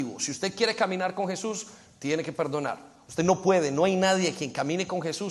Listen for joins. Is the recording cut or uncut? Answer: uncut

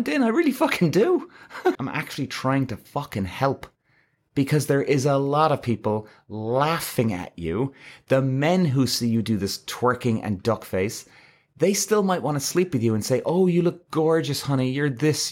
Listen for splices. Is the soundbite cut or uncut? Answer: cut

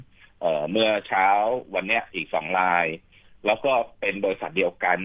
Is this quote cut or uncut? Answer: uncut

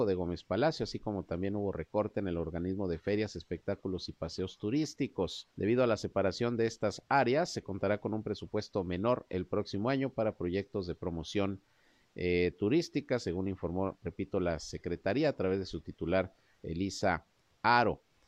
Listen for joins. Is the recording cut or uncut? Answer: cut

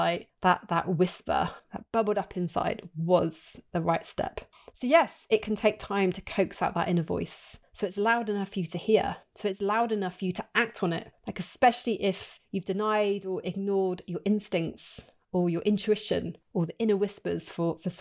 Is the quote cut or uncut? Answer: uncut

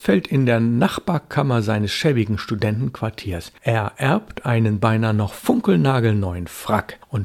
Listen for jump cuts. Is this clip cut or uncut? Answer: uncut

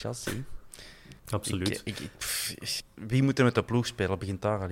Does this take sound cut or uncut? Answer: cut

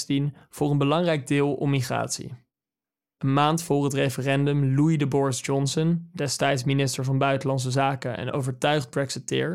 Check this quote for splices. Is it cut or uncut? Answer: uncut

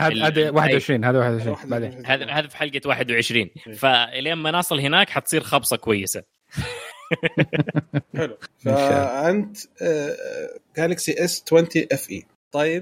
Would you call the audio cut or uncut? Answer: uncut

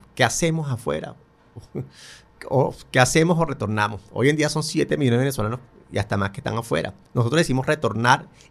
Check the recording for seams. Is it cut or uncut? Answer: uncut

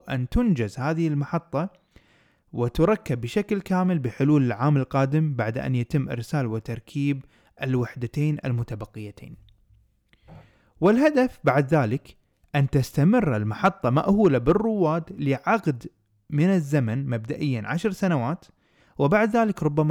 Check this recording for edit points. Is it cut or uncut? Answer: uncut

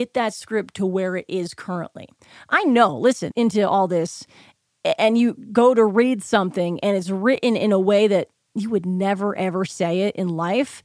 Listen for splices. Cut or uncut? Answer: cut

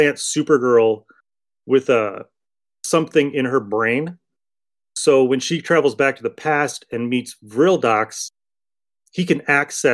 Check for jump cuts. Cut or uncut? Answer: uncut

